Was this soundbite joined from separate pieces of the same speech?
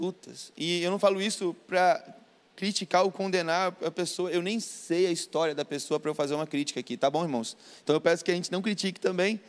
no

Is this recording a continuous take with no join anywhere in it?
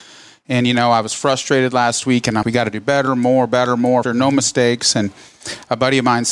no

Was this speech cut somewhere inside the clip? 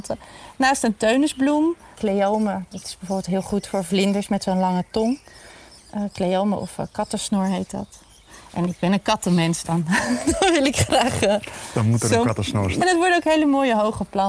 yes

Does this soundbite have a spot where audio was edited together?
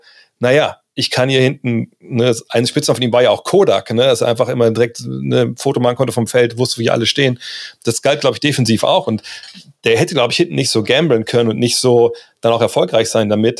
no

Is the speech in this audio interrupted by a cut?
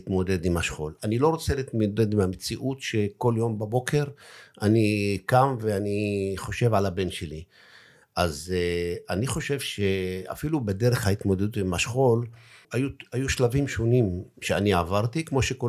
yes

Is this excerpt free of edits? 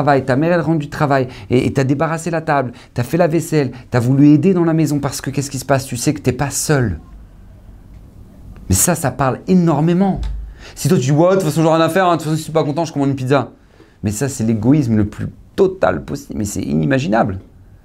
yes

